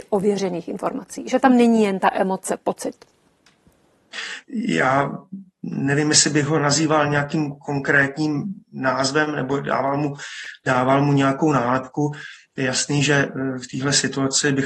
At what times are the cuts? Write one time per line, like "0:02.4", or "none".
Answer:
0:04.4